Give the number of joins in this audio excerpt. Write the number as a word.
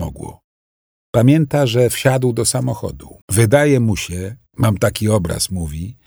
two